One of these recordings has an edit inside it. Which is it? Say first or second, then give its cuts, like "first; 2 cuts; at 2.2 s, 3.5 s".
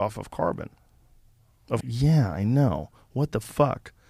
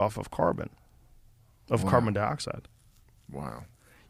first; 1 cut; at 1.8 s